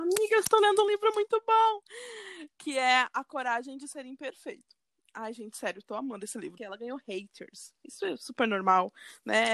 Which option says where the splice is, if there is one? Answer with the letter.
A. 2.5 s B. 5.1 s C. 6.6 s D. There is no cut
C